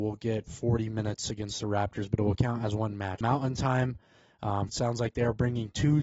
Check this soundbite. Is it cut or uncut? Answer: cut